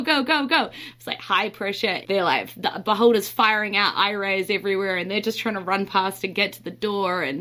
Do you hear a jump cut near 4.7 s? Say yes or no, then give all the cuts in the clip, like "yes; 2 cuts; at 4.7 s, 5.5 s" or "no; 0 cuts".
no; 1 cut; at 2.0 s